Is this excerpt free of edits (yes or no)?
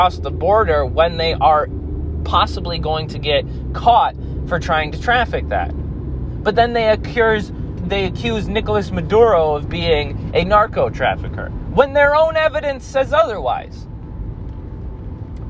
no